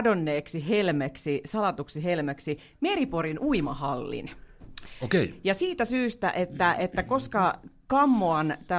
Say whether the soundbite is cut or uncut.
uncut